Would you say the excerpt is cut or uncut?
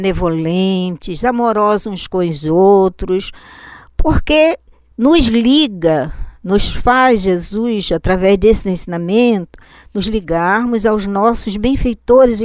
uncut